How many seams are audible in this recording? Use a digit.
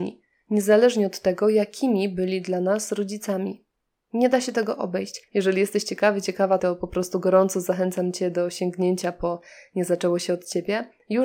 2